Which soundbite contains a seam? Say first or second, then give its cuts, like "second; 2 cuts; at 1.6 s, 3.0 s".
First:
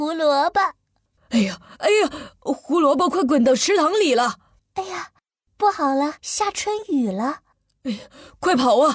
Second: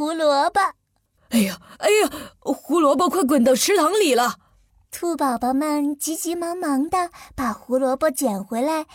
first; 2 cuts; at 4.6 s, 6.2 s